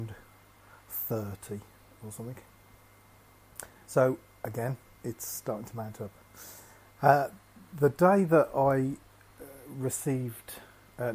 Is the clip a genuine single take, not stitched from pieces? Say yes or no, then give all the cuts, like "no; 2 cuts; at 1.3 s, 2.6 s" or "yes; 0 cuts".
yes; 0 cuts